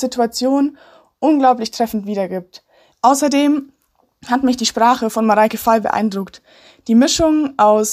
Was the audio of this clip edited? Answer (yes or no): yes